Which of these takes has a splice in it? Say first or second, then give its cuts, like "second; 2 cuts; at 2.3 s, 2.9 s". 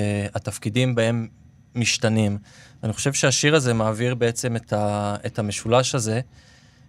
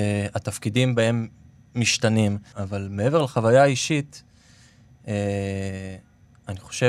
second; 1 cut; at 2.5 s